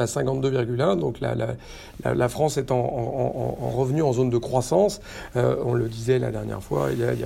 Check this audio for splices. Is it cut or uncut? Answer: uncut